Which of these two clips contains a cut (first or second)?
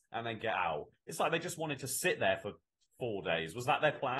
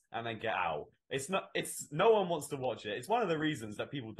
first